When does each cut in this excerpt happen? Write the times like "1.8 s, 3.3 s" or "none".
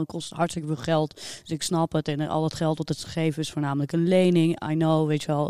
none